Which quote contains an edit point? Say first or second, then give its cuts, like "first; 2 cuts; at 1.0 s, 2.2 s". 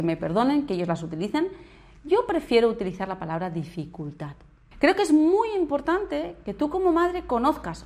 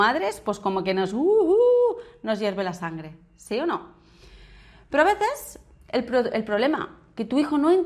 first; 1 cut; at 4.7 s